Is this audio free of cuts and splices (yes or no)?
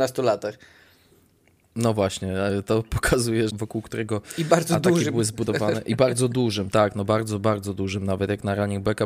no